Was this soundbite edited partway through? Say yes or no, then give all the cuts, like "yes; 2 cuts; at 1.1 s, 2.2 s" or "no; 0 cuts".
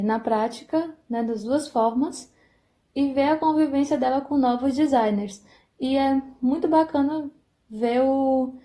no; 0 cuts